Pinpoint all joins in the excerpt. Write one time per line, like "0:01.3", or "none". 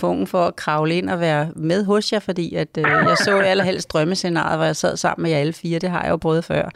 none